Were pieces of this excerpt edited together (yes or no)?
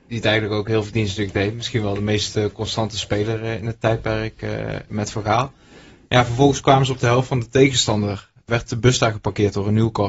no